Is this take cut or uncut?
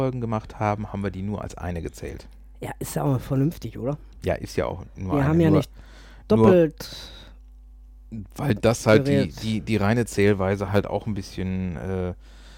uncut